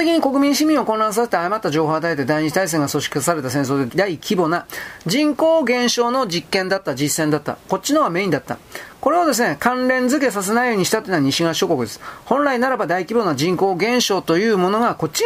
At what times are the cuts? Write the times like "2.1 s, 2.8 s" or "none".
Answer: 3.9 s